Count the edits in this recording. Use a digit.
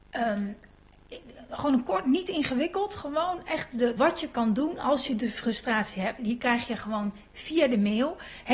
2